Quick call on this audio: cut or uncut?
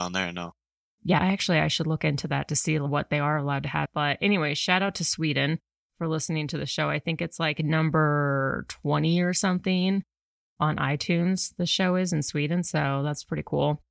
uncut